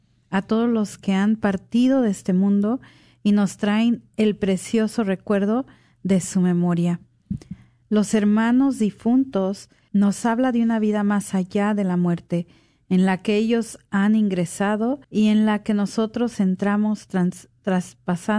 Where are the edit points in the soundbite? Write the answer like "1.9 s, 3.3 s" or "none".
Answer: 7.8 s, 9.9 s, 15.0 s